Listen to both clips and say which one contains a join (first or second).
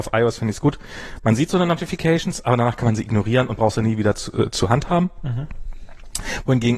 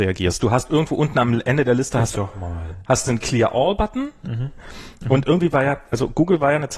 second